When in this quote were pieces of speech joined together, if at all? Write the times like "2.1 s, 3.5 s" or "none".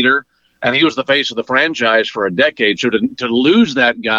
none

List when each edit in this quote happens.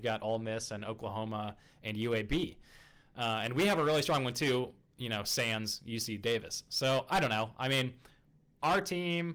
none

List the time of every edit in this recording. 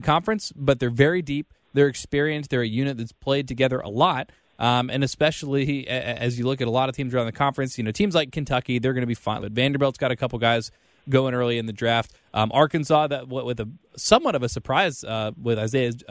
9.4 s

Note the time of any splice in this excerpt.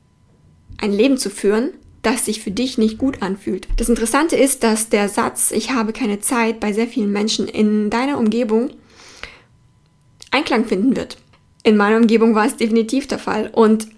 3.7 s

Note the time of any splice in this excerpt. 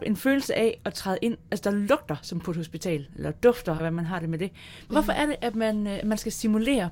1.5 s, 3.8 s, 4.9 s

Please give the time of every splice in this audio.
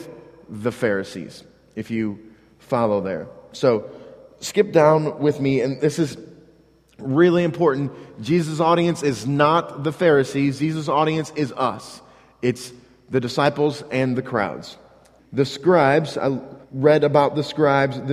15.2 s, 16.6 s

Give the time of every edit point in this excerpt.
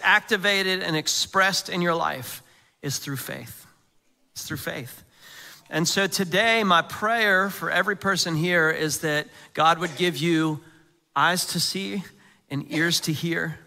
none

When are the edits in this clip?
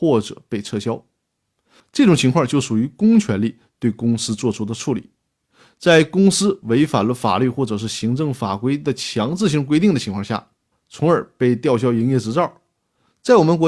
10.7 s

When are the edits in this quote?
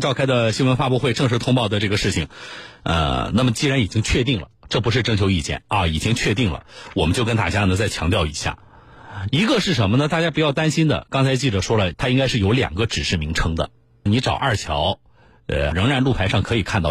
11.9 s, 14.1 s, 15.7 s

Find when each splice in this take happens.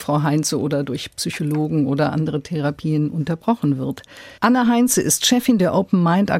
4.4 s

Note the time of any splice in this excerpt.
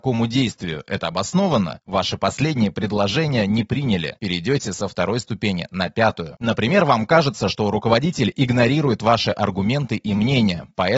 4.2 s

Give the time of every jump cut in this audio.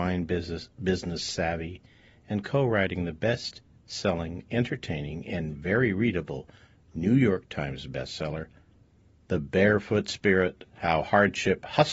none

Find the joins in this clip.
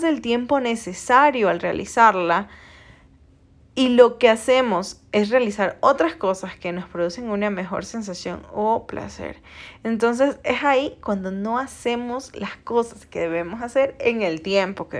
none

